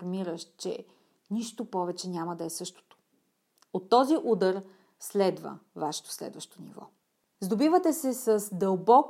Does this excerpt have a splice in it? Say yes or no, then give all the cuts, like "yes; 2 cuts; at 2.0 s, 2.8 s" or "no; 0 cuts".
yes; 1 cut; at 7.3 s